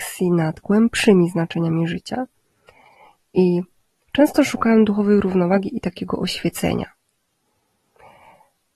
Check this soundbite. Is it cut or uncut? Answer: uncut